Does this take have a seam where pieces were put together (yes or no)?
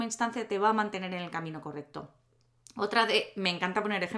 no